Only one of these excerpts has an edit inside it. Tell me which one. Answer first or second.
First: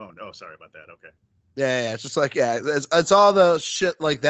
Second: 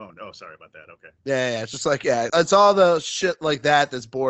second